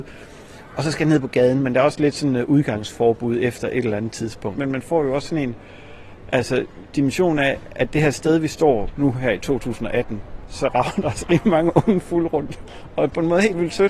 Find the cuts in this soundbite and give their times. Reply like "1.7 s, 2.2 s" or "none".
4.6 s, 9.0 s

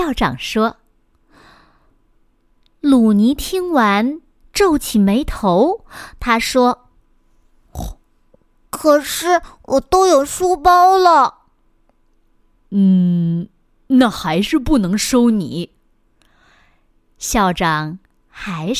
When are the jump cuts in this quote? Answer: none

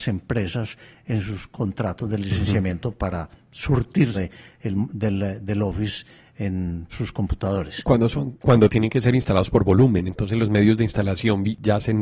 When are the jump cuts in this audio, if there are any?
4.1 s, 6.9 s

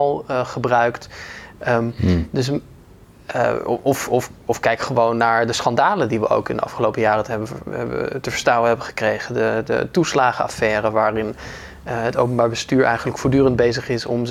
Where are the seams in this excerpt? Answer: none

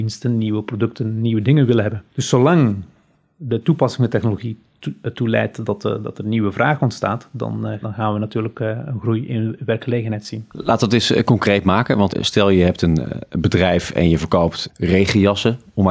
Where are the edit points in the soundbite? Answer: 7.8 s

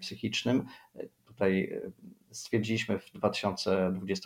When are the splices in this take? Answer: 1.2 s

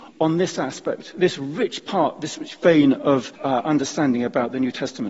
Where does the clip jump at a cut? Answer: 3.3 s

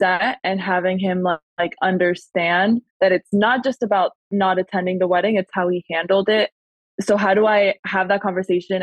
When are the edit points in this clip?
none

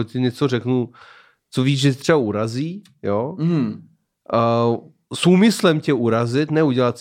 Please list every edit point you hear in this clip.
none

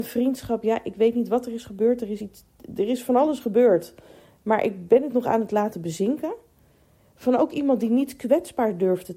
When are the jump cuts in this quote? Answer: none

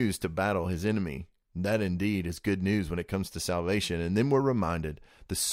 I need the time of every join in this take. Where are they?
1.5 s

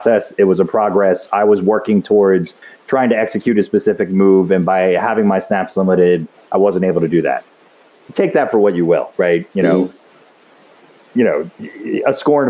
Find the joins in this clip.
none

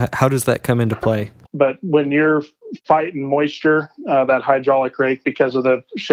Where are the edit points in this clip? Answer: 1.4 s

